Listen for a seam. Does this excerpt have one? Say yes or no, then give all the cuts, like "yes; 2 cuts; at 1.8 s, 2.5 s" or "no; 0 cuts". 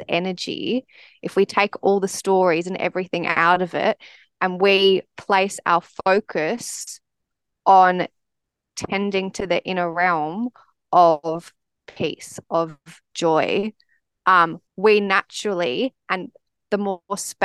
yes; 2 cuts; at 12.4 s, 14.7 s